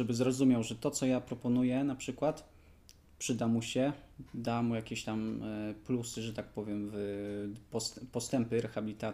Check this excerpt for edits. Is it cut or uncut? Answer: uncut